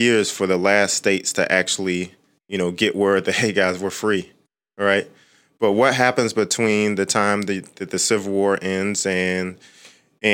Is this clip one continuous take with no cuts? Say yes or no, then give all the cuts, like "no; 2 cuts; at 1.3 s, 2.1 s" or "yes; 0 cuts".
yes; 0 cuts